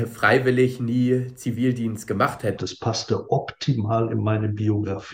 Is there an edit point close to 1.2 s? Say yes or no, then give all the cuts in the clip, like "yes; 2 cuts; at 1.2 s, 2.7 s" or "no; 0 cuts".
no; 1 cut; at 2.6 s